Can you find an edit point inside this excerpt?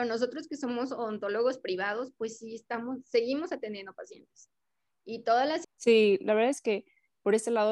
yes; 1 cut; at 5.6 s

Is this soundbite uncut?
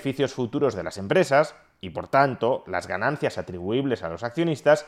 yes; 0 cuts

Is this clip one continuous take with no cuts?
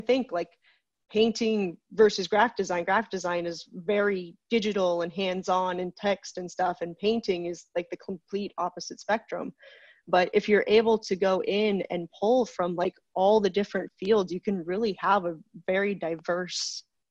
yes; 0 cuts

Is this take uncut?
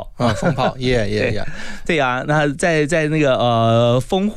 yes; 0 cuts

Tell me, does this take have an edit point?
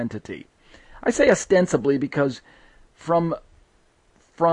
no; 0 cuts

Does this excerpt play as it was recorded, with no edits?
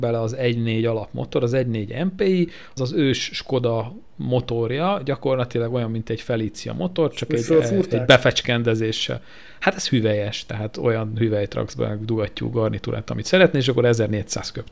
no; 1 cut; at 2.8 s

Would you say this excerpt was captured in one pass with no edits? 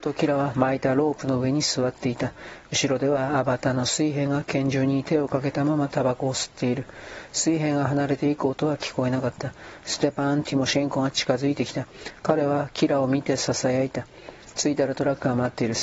yes; 0 cuts

